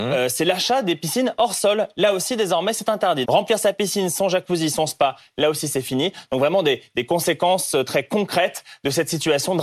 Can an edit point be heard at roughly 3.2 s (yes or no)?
yes